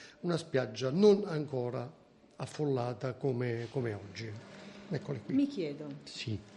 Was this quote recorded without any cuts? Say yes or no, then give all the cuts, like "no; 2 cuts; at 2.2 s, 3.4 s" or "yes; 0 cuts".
yes; 0 cuts